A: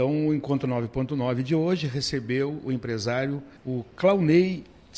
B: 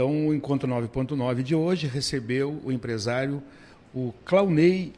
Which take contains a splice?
A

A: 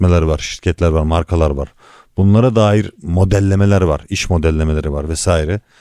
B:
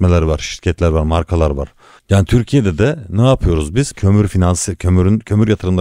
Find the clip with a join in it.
B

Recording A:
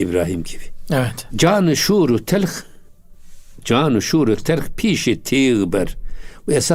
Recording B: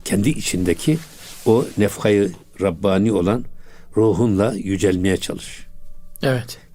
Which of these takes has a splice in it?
A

